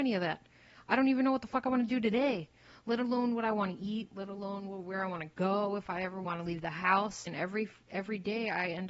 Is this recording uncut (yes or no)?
no